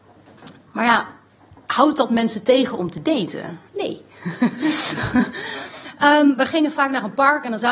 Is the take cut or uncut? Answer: cut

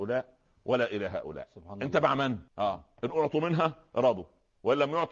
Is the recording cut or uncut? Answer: cut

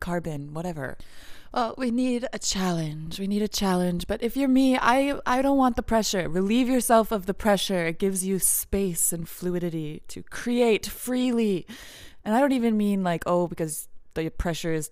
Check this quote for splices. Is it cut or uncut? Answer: uncut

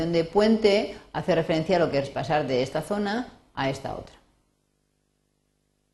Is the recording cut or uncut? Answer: cut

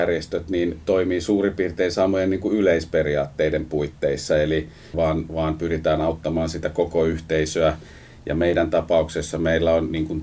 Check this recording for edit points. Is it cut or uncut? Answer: cut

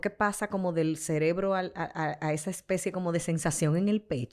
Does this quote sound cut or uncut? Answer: uncut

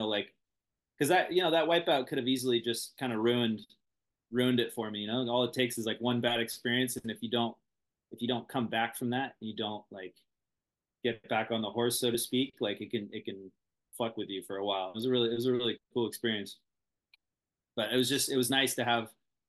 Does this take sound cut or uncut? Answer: cut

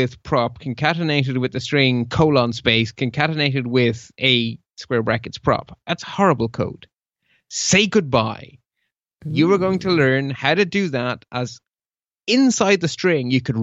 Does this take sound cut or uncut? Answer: uncut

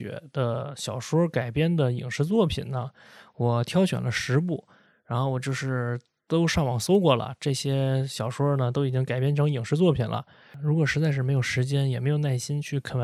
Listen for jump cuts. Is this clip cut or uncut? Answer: uncut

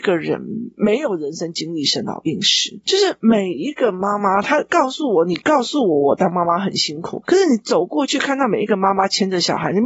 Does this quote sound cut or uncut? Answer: uncut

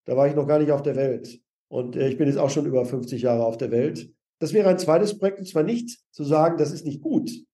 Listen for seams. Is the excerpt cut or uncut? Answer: uncut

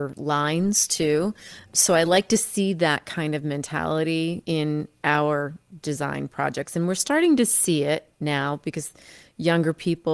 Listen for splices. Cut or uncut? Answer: uncut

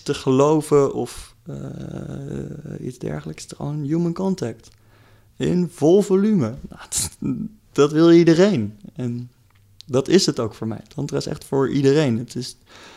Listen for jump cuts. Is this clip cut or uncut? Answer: uncut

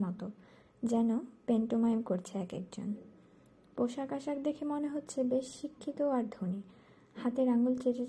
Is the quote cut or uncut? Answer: uncut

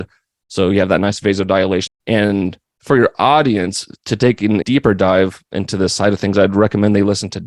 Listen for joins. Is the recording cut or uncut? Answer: cut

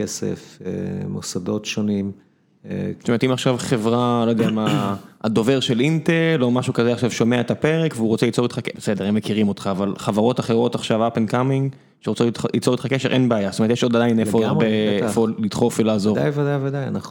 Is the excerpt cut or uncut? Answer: cut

